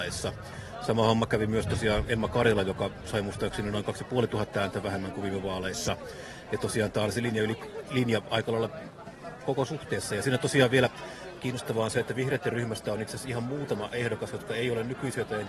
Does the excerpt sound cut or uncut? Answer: uncut